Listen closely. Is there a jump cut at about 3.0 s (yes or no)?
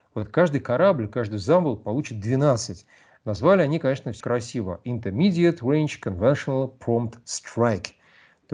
no